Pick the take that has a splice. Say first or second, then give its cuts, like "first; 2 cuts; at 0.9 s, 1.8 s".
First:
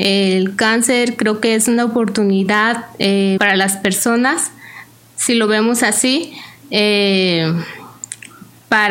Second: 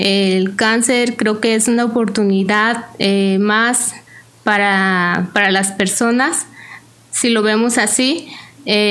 first; 1 cut; at 3.4 s